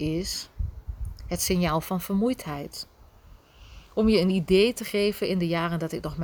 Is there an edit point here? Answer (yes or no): no